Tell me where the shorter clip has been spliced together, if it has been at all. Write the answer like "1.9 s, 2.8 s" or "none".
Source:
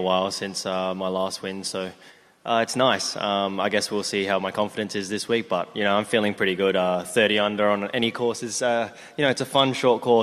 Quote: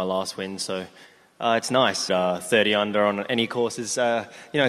2.1 s